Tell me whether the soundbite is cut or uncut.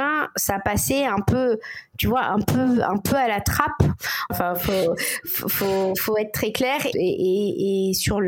cut